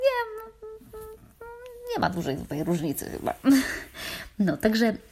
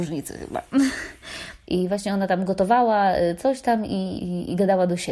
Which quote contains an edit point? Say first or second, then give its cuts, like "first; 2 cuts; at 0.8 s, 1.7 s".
second; 2 cuts; at 1.6 s, 4.2 s